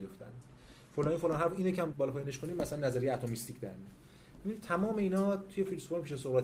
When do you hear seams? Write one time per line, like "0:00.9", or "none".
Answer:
0:01.9